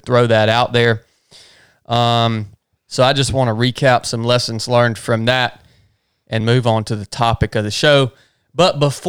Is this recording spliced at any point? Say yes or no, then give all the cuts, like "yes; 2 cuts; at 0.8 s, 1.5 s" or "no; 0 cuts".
yes; 2 cuts; at 2.8 s, 6.4 s